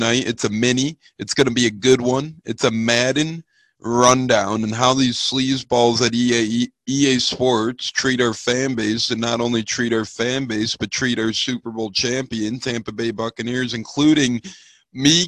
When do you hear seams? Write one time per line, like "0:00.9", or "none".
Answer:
none